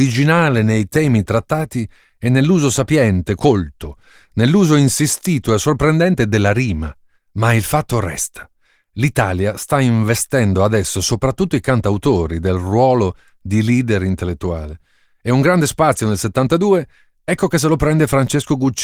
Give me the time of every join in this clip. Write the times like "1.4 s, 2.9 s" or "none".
3.4 s, 7.2 s